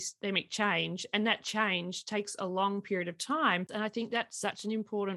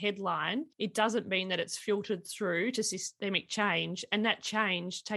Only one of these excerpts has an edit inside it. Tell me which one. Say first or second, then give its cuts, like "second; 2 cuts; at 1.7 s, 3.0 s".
first; 1 cut; at 3.7 s